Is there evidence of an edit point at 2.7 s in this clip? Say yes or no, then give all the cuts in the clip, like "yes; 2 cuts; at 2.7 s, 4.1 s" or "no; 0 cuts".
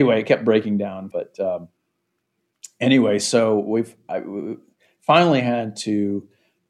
no; 1 cut; at 1.1 s